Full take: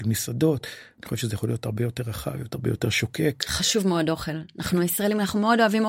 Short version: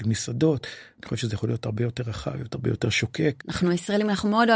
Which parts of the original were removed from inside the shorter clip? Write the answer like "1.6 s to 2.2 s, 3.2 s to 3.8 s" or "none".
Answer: 3.4 s to 4.5 s